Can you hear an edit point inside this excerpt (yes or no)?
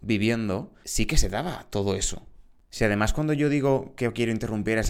no